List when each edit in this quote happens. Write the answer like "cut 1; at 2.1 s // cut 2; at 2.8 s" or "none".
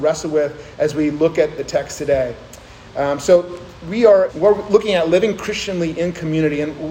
cut 1; at 4.3 s